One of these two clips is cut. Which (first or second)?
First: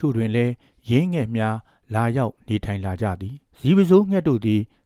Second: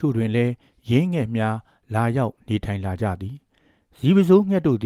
first